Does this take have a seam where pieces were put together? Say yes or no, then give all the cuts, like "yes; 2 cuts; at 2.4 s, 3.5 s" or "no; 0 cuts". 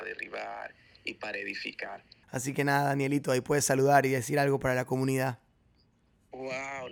yes; 1 cut; at 2.2 s